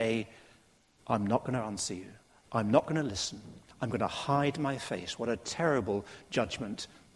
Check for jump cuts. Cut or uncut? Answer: uncut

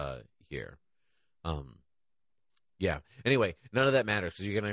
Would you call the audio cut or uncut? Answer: uncut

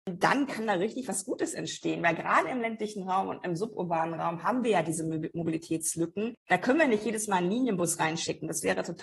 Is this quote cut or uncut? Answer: uncut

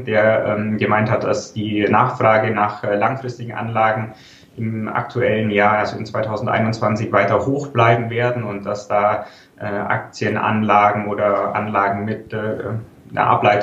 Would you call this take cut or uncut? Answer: uncut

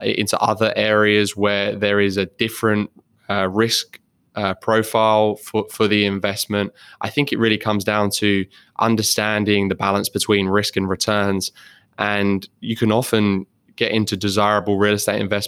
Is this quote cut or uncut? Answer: uncut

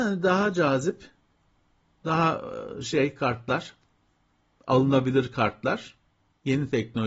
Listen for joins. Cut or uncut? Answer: uncut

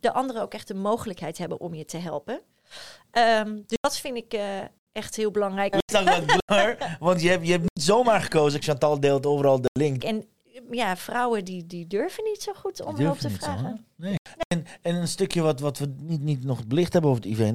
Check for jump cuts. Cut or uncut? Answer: cut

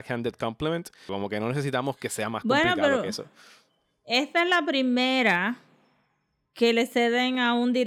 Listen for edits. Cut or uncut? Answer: cut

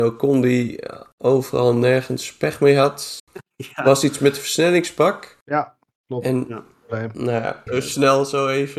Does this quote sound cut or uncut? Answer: cut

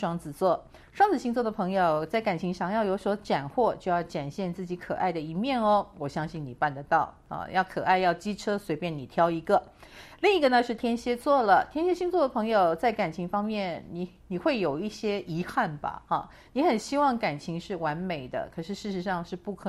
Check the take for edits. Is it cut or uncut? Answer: uncut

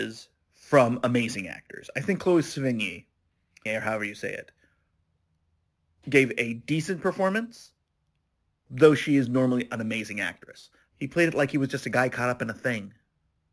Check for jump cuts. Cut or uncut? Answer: cut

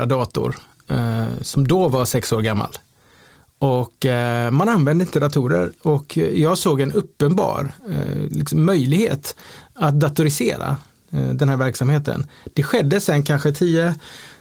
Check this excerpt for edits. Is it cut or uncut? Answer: uncut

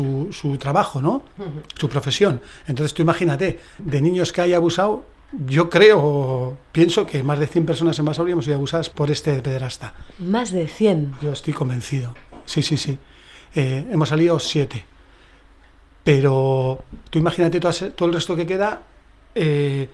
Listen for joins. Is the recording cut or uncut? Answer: cut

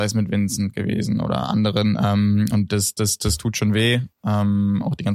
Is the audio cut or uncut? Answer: uncut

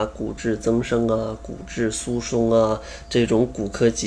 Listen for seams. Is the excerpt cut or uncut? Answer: uncut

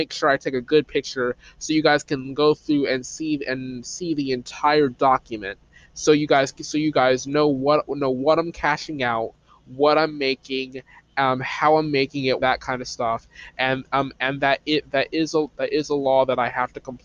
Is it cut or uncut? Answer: cut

